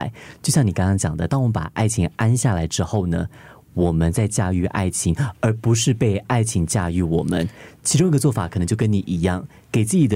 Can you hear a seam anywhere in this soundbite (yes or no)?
no